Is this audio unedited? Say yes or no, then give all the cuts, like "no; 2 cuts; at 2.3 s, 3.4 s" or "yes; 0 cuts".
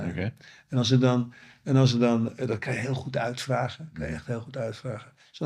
yes; 0 cuts